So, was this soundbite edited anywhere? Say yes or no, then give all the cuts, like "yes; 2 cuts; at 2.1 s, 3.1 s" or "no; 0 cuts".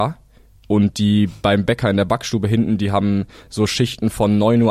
no; 0 cuts